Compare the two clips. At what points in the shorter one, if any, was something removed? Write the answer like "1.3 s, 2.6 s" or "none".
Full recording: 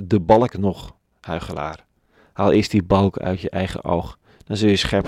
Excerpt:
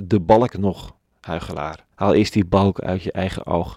1.9 s